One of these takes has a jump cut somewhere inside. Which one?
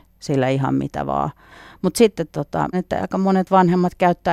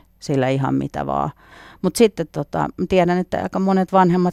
first; 1 cut; at 2.7 s

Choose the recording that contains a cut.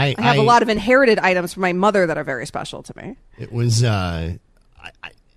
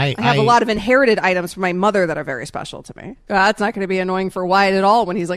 second; 1 cut; at 3.3 s

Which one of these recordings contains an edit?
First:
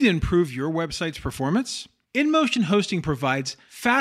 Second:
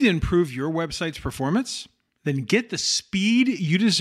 first; 1 cut; at 2.0 s

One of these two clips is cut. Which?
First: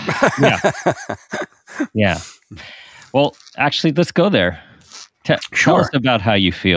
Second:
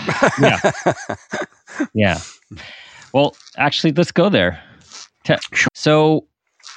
second; 1 cut; at 5.7 s

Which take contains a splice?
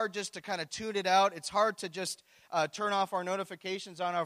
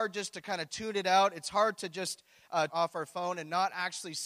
second; 1 cut; at 2.7 s

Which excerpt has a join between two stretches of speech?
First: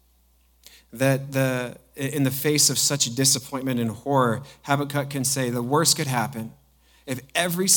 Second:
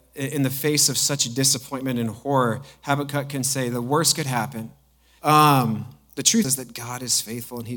second; 2 cuts; at 5.2 s, 6.4 s

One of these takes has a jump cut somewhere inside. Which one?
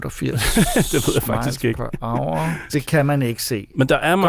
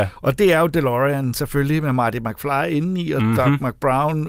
first; 1 cut; at 2.7 s

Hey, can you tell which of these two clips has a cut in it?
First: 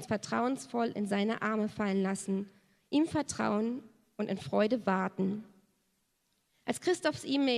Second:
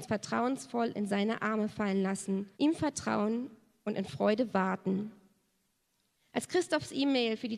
second; 1 cut; at 2.5 s

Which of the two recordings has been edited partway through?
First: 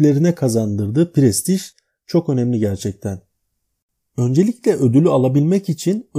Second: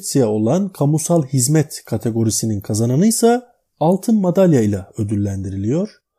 first; 1 cut; at 4.0 s

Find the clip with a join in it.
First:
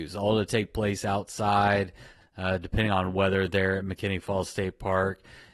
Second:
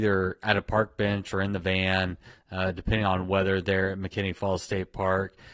first; 1 cut; at 2.2 s

